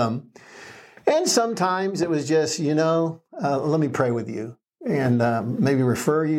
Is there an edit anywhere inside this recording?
no; 0 cuts

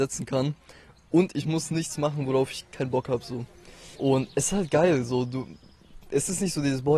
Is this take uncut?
no; 1 cut; at 3.9 s

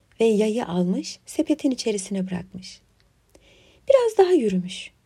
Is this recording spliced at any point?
no; 0 cuts

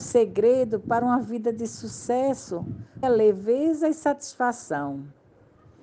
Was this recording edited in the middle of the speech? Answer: yes; 1 cut; at 3.0 s

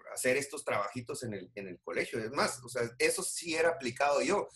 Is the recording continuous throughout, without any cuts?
yes; 0 cuts

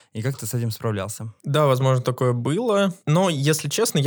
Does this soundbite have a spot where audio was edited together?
no; 0 cuts

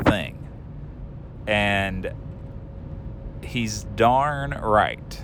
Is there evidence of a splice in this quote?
no; 0 cuts

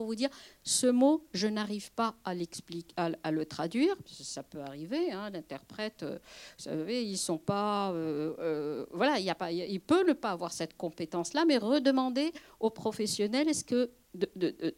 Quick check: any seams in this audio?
no; 0 cuts

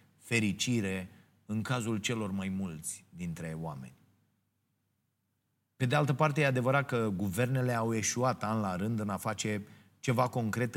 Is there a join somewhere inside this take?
no; 0 cuts

